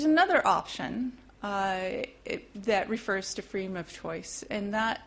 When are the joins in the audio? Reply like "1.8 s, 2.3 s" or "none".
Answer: none